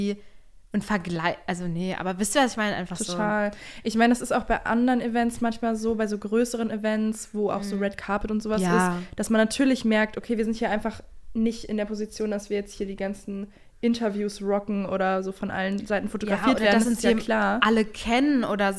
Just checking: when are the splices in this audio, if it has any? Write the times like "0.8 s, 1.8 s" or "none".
none